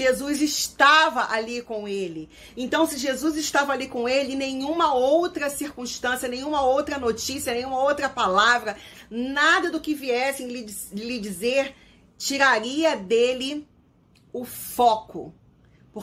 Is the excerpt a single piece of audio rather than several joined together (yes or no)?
yes